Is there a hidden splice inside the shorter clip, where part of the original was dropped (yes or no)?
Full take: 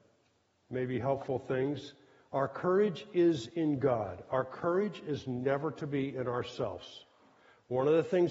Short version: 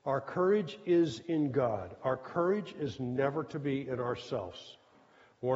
no